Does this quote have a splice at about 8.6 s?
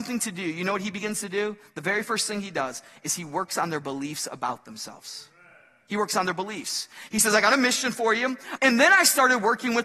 yes; 1 cut; at 8.6 s

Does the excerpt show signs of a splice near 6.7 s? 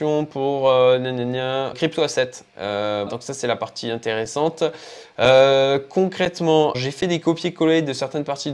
yes; 3 cuts; at 1.7 s, 3.1 s, 6.7 s

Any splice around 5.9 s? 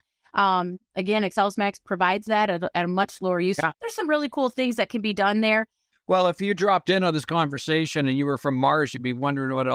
yes; 2 cuts; at 3.7 s, 5.9 s

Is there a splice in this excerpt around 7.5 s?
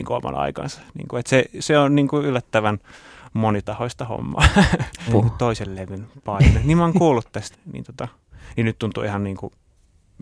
yes; 2 cuts; at 5.1 s, 7.5 s

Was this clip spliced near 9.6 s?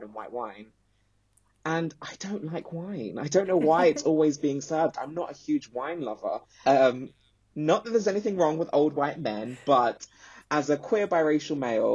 no; 1 cut; at 6.6 s

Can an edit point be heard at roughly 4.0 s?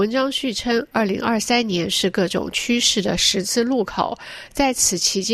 no; 1 cut; at 0.9 s

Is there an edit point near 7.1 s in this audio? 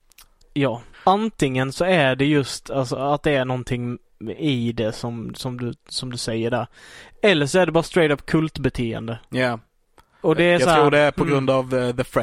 no; 2 cuts; at 0.9 s, 9.3 s

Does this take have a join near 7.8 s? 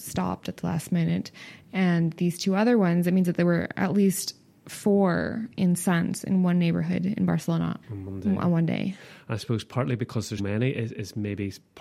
yes; 2 cuts; at 7.8 s, 10.4 s

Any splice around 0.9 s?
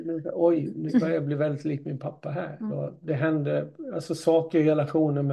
no; 1 cut; at 2.7 s

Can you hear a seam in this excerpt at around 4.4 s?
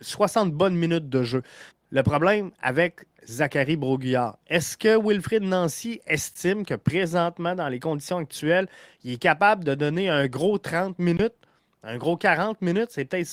no; 1 cut; at 1.7 s

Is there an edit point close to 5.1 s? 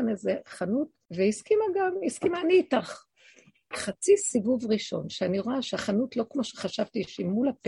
no; 2 cuts; at 1.1 s, 3.7 s

